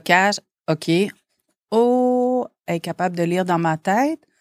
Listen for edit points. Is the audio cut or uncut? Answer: uncut